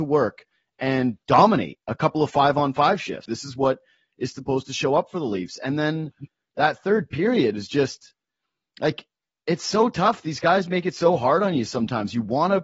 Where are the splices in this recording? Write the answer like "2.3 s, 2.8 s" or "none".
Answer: 3.3 s